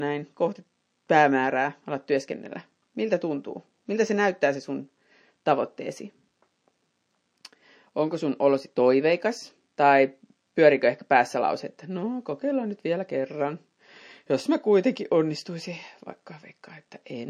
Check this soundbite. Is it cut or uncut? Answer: cut